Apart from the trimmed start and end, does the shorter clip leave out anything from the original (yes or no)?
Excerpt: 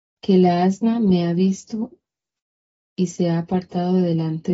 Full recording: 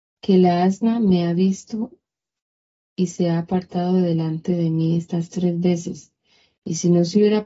no